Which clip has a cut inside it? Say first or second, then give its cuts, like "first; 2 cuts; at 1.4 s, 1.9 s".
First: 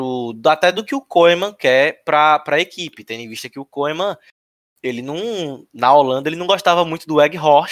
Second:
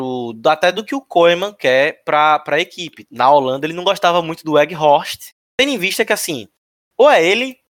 second; 2 cuts; at 3.0 s, 5.5 s